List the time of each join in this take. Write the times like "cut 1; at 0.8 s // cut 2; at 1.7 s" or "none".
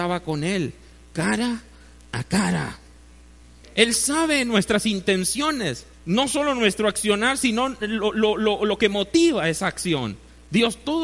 cut 1; at 3.6 s // cut 2; at 5.9 s